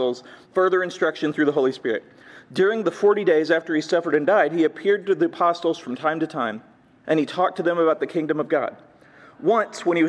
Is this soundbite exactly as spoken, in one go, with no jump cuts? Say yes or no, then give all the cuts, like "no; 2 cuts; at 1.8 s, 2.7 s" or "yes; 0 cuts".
no; 1 cut; at 7.0 s